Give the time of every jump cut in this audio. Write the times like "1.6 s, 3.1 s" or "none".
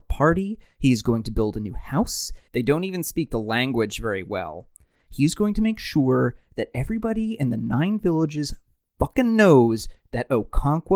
2.5 s, 5.0 s